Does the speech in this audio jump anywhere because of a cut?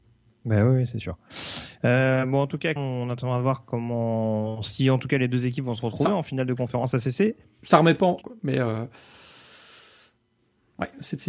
yes; 2 cuts; at 2.8 s, 8.2 s

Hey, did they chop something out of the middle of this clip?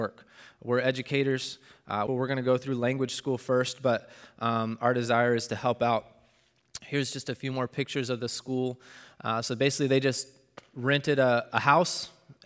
yes; 1 cut; at 2.1 s

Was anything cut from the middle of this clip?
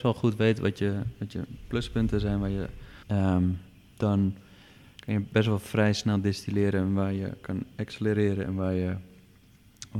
yes; 1 cut; at 3.0 s

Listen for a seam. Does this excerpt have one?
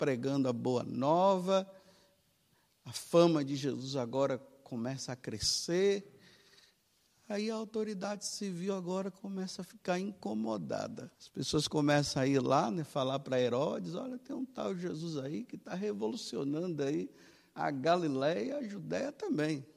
yes; 1 cut; at 11.1 s

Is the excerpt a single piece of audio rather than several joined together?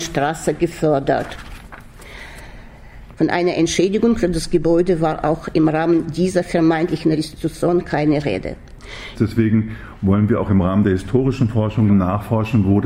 no; 3 cuts; at 3.1 s, 9.2 s, 11.9 s

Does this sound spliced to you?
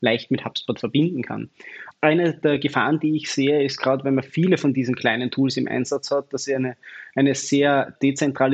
no; 0 cuts

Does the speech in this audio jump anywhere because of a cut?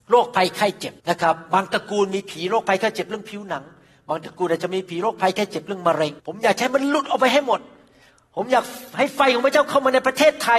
yes; 2 cuts; at 1.0 s, 6.2 s

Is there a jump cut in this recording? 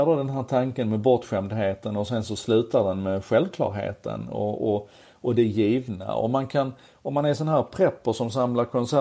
no; 0 cuts

